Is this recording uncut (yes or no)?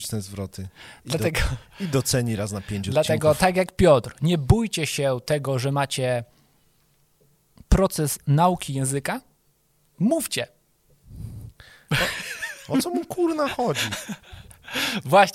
yes